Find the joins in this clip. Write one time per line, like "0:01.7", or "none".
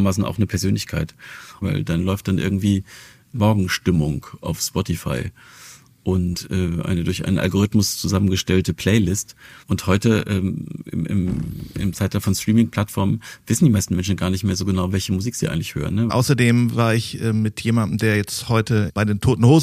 0:01.6
0:09.6
0:16.1